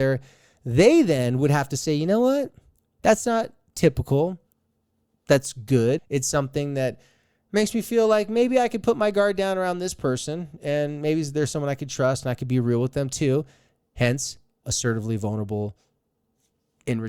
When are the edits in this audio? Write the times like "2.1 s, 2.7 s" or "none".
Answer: 6.0 s, 14.6 s